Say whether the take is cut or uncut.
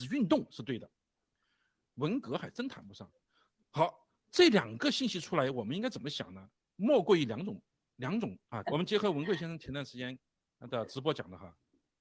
cut